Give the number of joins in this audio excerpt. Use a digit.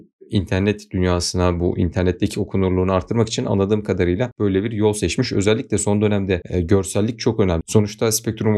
1